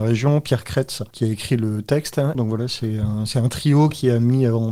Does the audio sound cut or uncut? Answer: cut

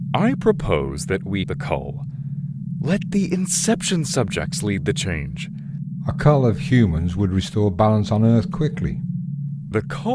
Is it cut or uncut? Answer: cut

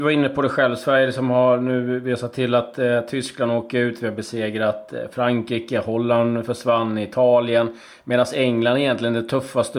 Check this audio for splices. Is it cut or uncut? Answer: uncut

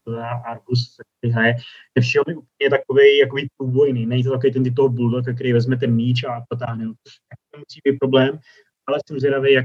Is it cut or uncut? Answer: uncut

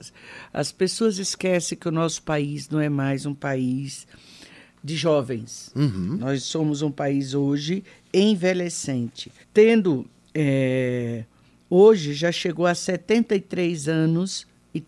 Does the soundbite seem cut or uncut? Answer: cut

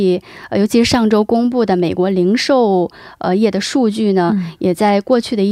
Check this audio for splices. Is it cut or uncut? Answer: uncut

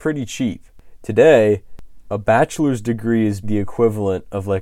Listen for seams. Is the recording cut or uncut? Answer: cut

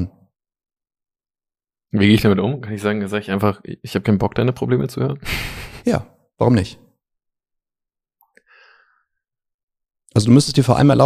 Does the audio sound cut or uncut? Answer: uncut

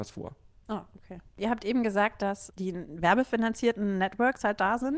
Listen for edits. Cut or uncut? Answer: cut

